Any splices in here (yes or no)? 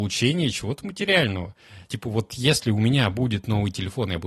no